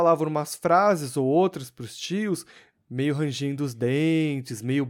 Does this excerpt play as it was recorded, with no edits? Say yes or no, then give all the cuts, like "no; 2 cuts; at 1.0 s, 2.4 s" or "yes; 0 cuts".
no; 1 cut; at 2.7 s